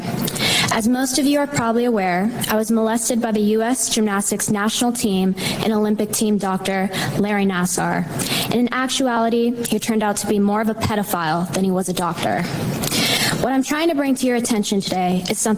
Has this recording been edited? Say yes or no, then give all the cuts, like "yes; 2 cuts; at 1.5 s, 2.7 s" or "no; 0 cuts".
no; 0 cuts